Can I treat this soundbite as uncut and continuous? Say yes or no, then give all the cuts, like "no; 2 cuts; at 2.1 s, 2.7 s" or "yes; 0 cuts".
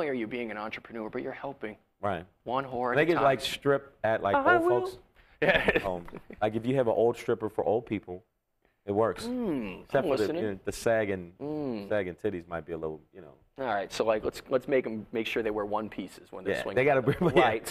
yes; 0 cuts